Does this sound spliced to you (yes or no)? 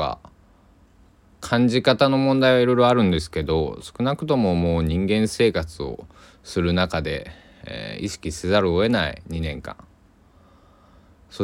no